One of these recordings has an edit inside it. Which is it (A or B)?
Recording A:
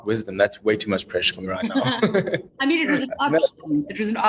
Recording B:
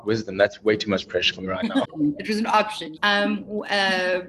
B